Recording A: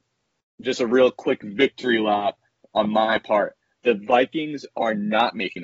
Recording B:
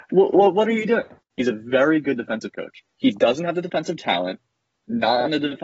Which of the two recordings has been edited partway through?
B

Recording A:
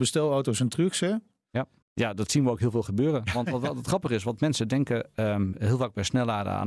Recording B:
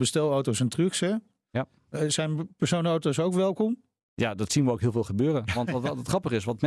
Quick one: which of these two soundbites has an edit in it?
A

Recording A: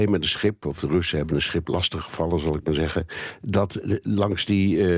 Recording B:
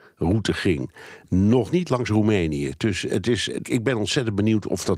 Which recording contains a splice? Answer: B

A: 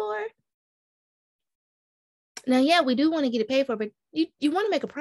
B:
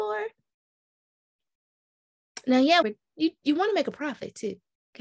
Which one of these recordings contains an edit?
B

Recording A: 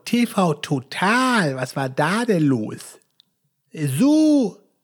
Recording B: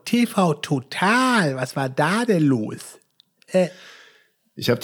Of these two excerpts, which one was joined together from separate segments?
B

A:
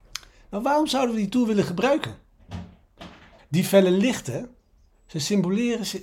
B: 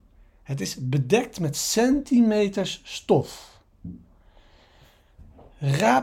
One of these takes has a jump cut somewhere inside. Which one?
A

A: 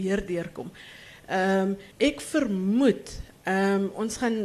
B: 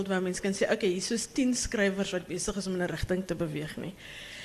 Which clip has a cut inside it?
A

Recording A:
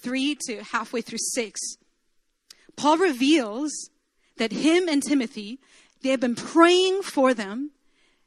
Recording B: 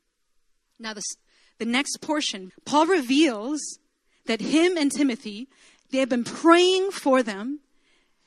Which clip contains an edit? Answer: B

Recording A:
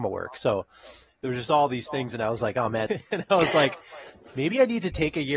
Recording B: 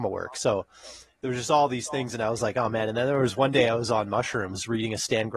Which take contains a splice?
A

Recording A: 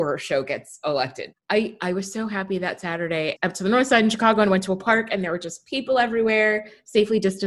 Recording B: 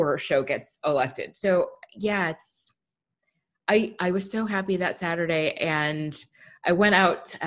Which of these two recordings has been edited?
A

